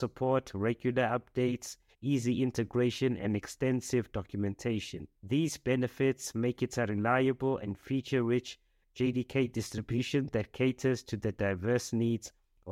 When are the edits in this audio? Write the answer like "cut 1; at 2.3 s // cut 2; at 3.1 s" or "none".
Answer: none